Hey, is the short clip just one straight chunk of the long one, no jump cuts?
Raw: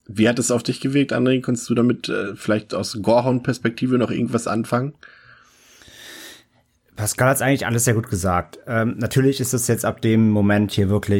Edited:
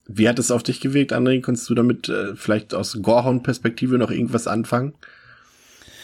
yes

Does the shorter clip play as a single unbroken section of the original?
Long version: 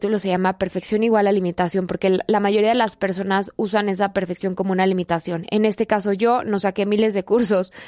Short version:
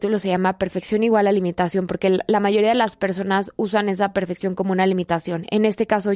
yes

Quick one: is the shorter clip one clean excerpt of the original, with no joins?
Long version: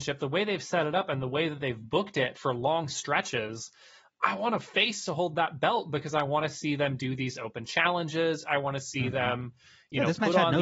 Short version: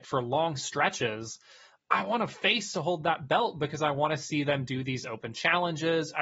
yes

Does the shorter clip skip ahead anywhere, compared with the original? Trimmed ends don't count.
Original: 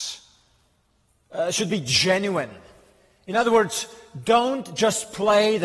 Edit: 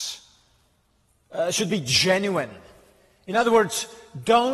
no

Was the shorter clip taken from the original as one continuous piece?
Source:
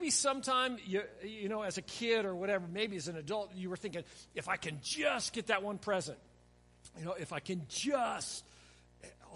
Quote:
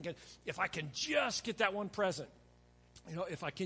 yes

